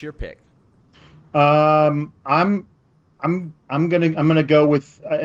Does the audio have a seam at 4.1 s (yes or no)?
no